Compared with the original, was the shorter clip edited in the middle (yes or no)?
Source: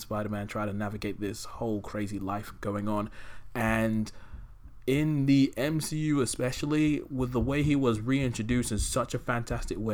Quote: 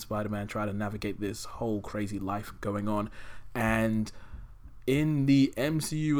no